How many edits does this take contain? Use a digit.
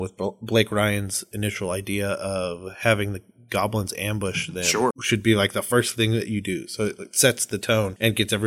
1